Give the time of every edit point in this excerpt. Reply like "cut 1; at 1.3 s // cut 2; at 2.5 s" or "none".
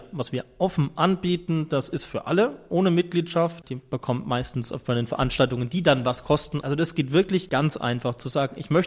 cut 1; at 3.6 s // cut 2; at 6.6 s